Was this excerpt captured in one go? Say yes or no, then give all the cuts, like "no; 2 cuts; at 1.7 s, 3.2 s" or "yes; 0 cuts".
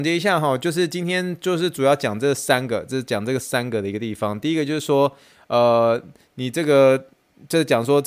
yes; 0 cuts